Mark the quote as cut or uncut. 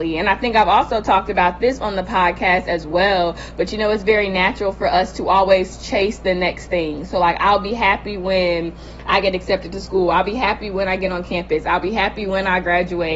uncut